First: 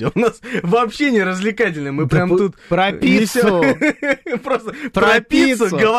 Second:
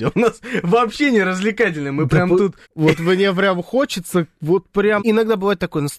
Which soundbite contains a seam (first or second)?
second